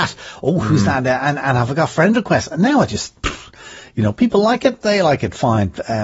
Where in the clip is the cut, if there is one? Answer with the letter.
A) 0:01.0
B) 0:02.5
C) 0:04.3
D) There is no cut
D